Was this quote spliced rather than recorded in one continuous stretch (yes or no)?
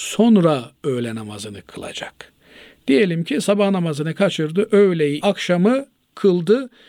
yes